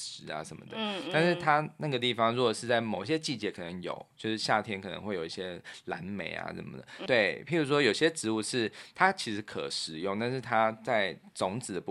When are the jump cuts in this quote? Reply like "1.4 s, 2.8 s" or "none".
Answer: 7.1 s